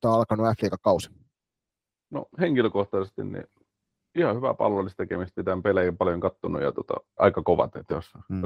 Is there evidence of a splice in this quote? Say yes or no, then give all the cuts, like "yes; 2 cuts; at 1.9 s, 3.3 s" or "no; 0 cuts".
yes; 2 cuts; at 2.3 s, 7.2 s